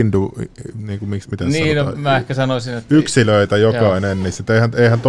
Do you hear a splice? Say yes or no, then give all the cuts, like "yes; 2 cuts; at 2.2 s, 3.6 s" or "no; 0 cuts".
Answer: no; 0 cuts